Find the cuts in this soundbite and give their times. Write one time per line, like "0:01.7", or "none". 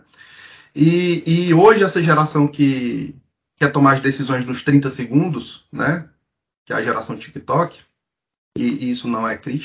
none